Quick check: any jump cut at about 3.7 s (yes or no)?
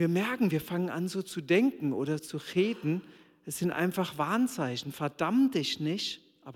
no